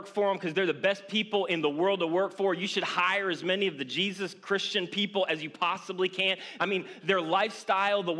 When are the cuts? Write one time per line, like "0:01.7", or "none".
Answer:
0:06.6

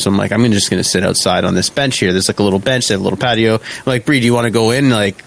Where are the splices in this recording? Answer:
none

